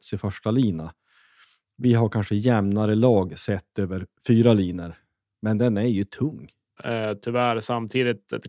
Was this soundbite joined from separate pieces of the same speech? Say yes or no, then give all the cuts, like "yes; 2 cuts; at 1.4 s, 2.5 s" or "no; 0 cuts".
yes; 1 cut; at 6.8 s